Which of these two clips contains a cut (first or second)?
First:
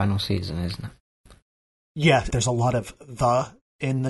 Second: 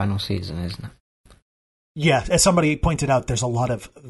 first